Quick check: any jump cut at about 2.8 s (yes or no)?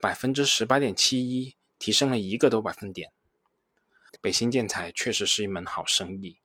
no